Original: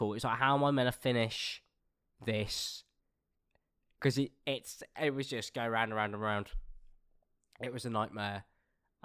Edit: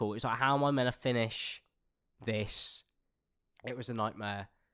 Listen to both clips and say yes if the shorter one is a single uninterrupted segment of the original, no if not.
no